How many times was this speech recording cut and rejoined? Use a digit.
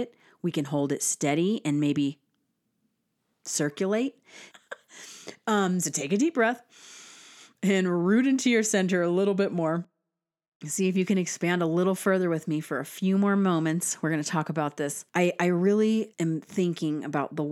3